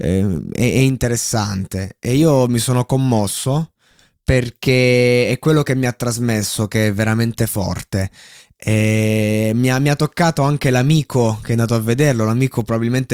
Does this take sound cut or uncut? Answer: uncut